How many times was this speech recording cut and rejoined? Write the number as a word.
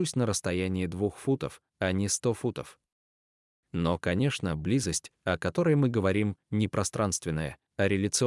zero